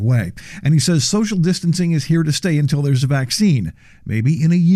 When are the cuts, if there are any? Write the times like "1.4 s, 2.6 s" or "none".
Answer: none